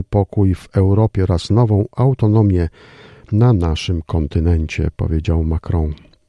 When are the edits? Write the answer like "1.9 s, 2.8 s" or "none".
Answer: none

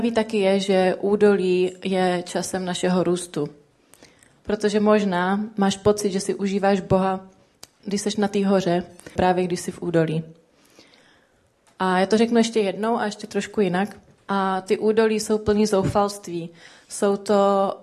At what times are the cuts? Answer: 7.8 s, 9.2 s, 14.2 s

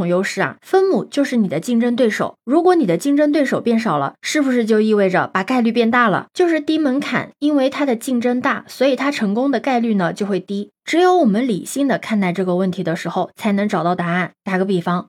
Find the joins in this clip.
6.3 s

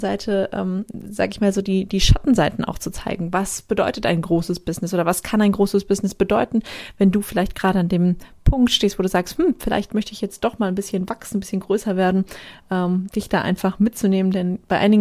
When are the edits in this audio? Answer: none

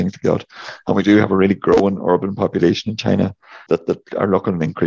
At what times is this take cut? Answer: 3.7 s

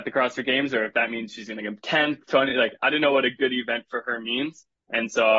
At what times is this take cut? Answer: none

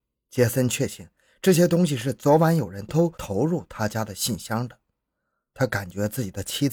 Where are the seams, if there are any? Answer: 2.9 s

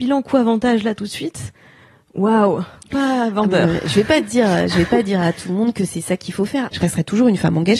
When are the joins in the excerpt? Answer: 6.7 s

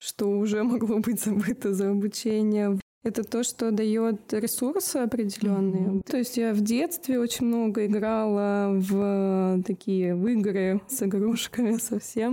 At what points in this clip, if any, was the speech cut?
6.1 s, 10.9 s

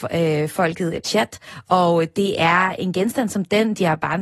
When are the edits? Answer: 1.0 s

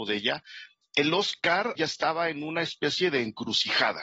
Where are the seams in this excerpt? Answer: 1.8 s

